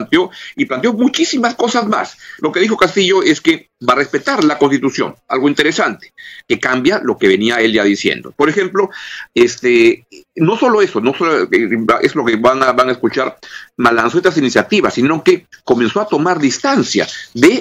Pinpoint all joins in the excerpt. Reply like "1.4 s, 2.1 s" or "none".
2.4 s, 8.3 s